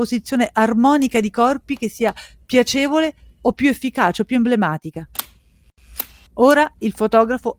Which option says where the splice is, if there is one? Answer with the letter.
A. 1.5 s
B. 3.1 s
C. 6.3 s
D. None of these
C